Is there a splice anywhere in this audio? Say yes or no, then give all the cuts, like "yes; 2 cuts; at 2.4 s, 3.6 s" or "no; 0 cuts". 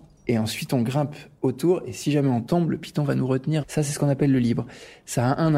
yes; 1 cut; at 3.6 s